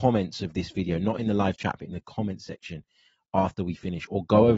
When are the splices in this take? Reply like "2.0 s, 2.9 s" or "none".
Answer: none